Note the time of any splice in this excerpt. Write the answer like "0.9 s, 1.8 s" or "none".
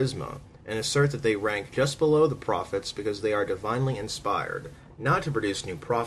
none